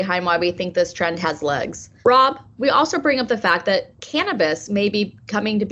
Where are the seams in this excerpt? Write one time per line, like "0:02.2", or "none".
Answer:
0:02.0